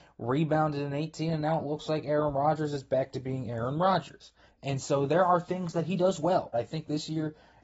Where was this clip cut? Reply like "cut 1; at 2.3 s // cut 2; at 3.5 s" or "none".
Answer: cut 1; at 4.5 s // cut 2; at 6.5 s